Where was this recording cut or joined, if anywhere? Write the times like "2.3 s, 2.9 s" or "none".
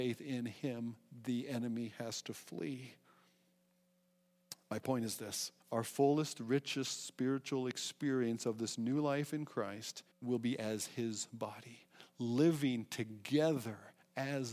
5.6 s, 10.1 s